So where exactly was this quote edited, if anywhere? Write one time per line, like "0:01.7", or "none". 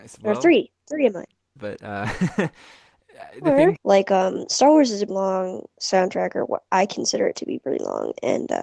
0:01.6
0:03.8
0:05.1